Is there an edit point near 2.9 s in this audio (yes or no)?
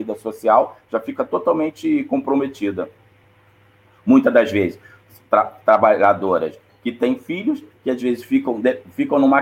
no